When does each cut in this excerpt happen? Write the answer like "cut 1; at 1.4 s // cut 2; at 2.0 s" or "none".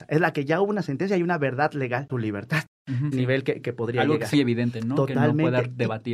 cut 1; at 2.1 s // cut 2; at 3.1 s // cut 3; at 4.3 s